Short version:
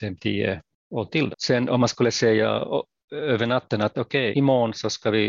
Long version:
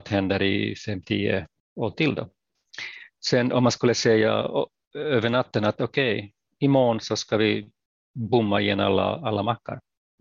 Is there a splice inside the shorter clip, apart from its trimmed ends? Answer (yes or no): yes